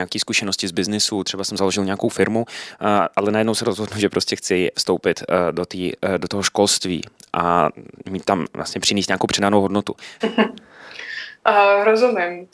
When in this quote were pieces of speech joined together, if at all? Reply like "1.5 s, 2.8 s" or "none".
10.2 s